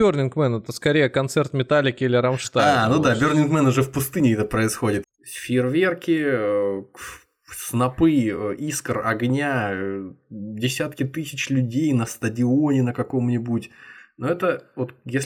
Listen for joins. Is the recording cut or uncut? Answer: cut